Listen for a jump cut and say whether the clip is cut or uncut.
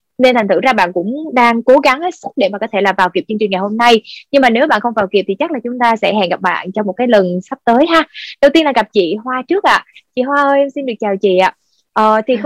uncut